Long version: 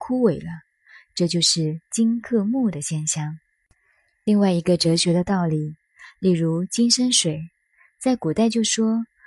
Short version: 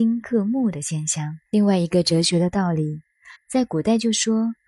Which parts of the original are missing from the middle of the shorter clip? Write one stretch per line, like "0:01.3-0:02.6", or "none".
0:03.5-0:04.2
0:06.1-0:07.9